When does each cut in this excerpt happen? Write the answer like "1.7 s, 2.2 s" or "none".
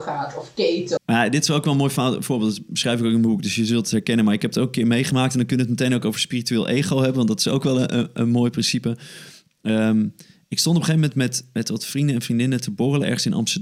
1.0 s